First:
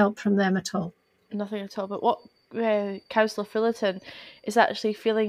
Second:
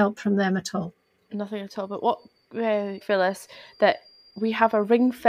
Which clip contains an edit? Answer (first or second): second